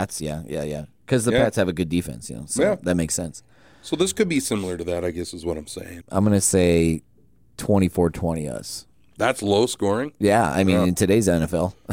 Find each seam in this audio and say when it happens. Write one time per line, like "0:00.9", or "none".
0:06.0

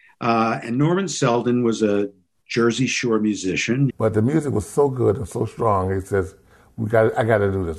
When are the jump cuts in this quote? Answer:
0:03.9

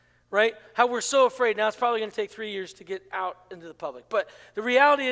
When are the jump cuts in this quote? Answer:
none

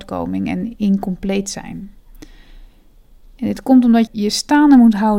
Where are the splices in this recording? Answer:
0:04.1

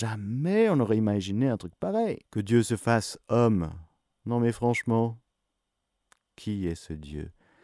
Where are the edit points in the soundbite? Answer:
0:02.3

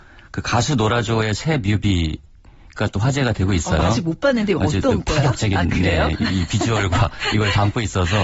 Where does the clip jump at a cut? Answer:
none

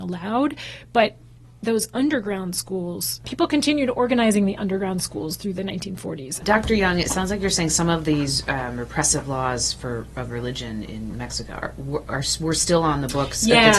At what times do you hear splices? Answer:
0:03.2
0:06.4

